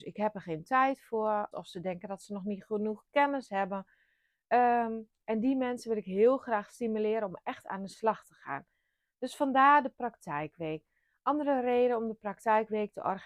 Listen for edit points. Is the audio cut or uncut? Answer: cut